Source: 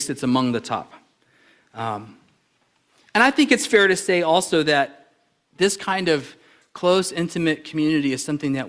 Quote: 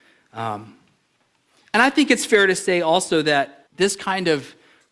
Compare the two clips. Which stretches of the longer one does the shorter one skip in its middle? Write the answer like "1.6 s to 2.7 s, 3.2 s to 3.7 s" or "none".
5.1 s to 5.5 s